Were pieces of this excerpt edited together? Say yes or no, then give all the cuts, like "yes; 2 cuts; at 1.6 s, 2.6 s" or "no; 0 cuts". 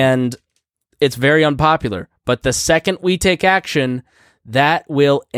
no; 0 cuts